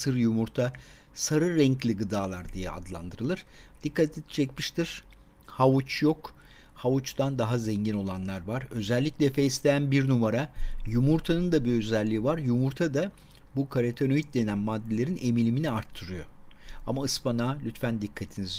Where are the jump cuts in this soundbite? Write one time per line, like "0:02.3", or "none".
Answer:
none